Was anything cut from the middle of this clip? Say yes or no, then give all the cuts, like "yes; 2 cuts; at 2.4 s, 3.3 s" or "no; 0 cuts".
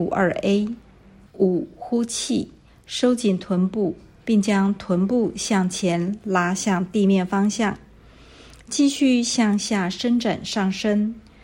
yes; 1 cut; at 1.3 s